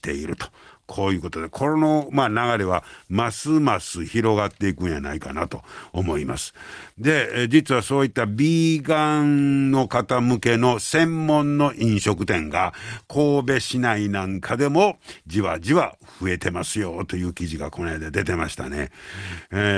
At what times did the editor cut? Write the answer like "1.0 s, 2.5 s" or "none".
none